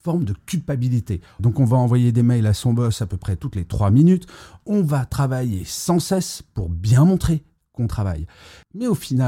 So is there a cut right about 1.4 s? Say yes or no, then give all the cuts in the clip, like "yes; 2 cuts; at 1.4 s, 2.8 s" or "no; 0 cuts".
yes; 1 cut; at 1.4 s